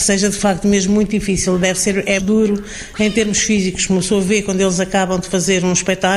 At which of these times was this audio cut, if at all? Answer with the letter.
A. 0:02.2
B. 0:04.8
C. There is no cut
A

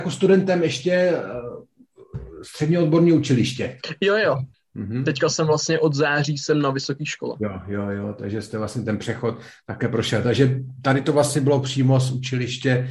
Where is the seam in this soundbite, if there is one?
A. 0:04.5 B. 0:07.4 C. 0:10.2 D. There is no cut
A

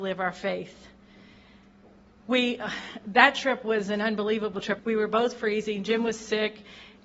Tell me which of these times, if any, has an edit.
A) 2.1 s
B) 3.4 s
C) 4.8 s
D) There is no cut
C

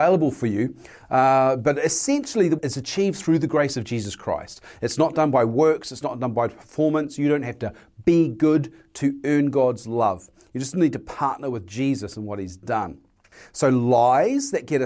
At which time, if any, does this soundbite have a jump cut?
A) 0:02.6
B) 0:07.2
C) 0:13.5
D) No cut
A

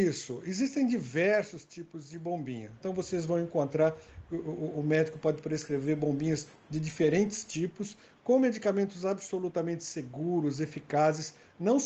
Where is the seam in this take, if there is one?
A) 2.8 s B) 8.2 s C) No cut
A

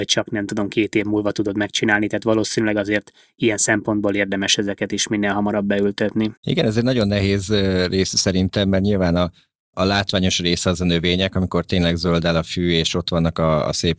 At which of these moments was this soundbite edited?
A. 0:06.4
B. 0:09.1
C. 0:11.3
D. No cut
A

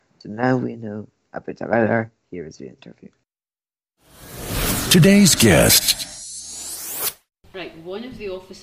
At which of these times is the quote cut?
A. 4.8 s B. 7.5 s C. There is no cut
B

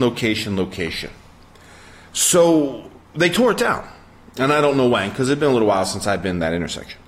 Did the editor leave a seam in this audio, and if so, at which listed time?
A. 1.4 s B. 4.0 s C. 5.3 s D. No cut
D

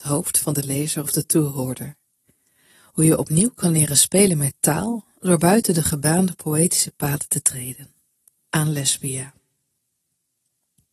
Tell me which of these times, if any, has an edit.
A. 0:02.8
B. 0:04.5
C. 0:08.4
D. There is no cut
C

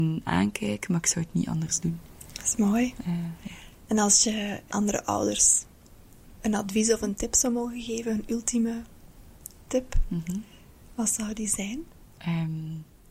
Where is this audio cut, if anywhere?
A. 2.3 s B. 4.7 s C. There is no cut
B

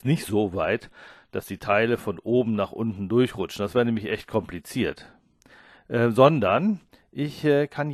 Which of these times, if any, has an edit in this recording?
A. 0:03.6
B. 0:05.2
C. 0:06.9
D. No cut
D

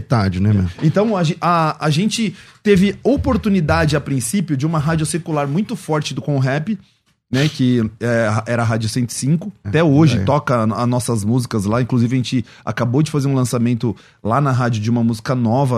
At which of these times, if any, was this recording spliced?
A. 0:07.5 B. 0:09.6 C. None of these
B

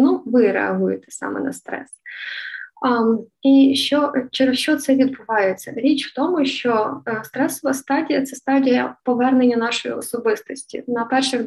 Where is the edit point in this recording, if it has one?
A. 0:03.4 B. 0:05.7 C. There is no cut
C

